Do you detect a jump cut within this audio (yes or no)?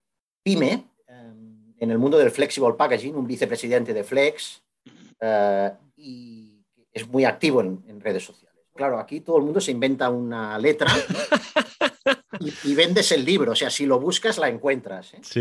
yes